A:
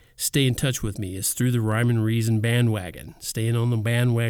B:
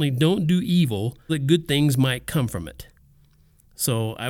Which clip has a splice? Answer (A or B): B